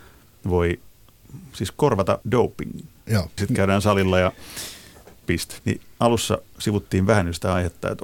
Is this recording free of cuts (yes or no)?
no